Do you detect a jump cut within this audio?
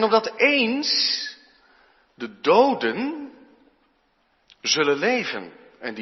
no; 0 cuts

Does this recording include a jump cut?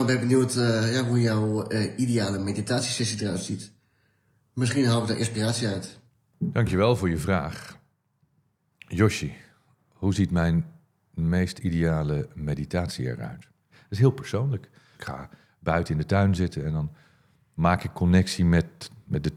yes; 1 cut; at 14.9 s

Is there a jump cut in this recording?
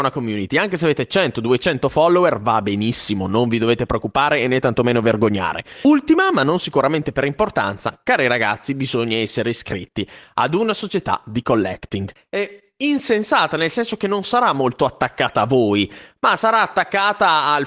yes; 1 cut; at 12.2 s

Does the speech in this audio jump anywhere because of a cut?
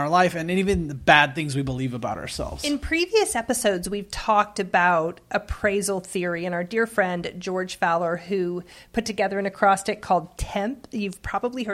no; 0 cuts

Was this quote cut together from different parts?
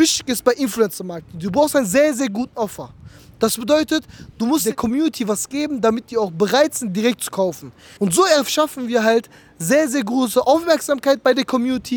yes; 1 cut; at 8.0 s

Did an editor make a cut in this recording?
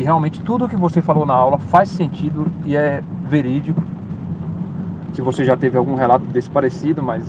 yes; 1 cut; at 5.1 s

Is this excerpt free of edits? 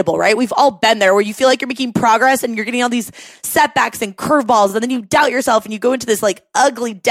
yes; 0 cuts

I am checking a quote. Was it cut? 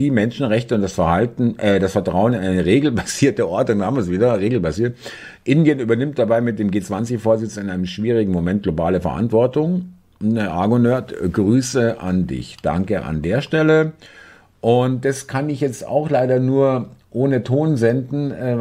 no; 0 cuts

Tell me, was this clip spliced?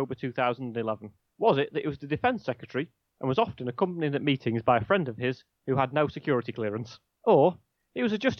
no; 0 cuts

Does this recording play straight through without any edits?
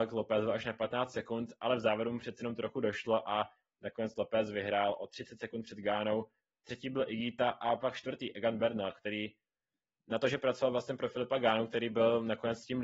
yes; 0 cuts

